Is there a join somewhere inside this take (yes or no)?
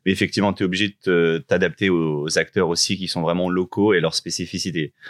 no